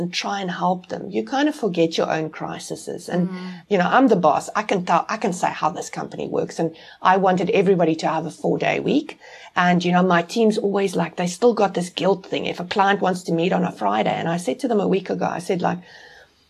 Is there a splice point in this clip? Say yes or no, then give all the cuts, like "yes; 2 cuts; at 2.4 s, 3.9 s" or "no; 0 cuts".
yes; 2 cuts; at 3.6 s, 9.5 s